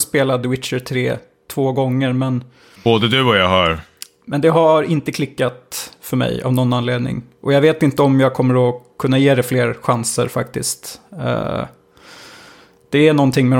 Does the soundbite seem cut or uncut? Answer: uncut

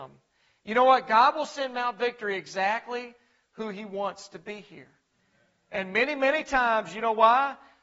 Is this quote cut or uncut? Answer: uncut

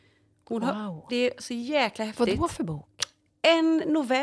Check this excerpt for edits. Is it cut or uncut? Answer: cut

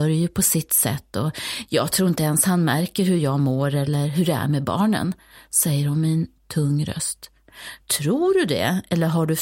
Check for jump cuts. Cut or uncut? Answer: uncut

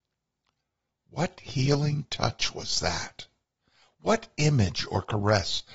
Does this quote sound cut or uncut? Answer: uncut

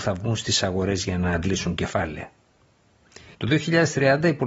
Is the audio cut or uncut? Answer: cut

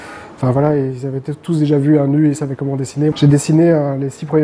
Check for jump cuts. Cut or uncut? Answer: cut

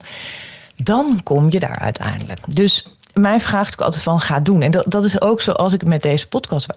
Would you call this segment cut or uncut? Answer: cut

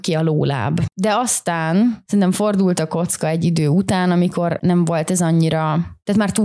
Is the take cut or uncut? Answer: cut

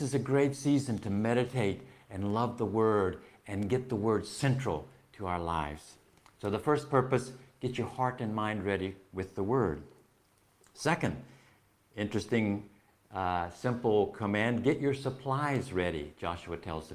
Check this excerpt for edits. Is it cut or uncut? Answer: uncut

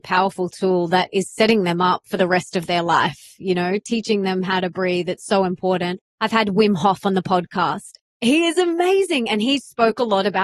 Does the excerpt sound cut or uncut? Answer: cut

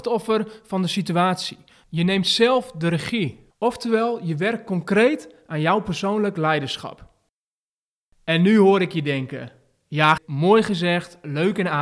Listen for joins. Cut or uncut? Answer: cut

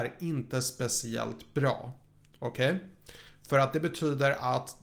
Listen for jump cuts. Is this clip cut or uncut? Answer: uncut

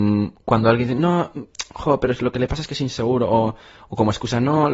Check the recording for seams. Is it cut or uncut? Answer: uncut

